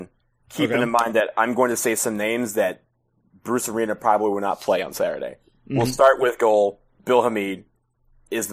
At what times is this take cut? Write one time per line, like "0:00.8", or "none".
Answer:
none